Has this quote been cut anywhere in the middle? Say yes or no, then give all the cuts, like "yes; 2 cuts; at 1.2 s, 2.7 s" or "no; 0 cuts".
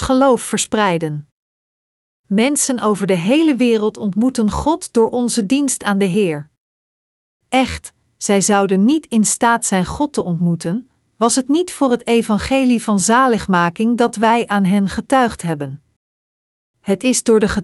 no; 0 cuts